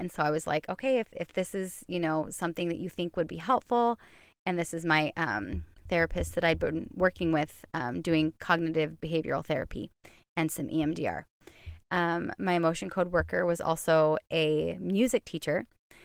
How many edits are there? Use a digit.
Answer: 1